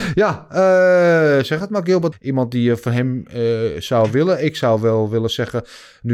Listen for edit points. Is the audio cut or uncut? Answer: cut